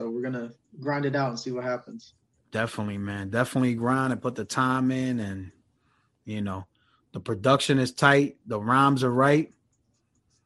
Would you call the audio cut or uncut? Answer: uncut